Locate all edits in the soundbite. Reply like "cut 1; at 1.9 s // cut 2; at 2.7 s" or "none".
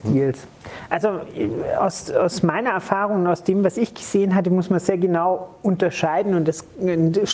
none